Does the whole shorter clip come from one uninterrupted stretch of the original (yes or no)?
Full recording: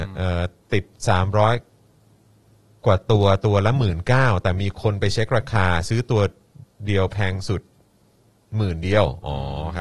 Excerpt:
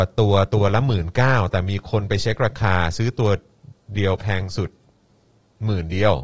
yes